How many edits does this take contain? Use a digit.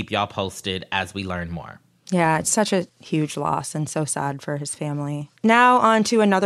1